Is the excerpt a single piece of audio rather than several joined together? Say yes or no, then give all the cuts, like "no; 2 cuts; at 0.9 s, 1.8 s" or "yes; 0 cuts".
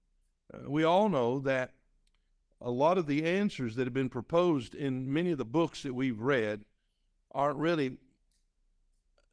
yes; 0 cuts